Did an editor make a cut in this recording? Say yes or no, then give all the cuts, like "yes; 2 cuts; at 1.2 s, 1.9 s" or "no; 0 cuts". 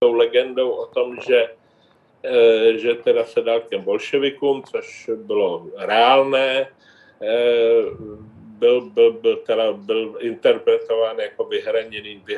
no; 0 cuts